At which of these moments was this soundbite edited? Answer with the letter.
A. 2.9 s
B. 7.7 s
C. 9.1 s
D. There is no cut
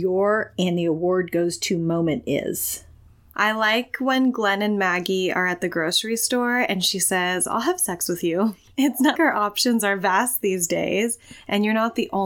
C